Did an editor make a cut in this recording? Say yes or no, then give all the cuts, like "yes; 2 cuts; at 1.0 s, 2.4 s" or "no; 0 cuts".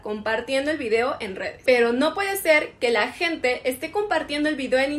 yes; 1 cut; at 1.7 s